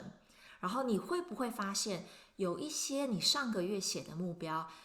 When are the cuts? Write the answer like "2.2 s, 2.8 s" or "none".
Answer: none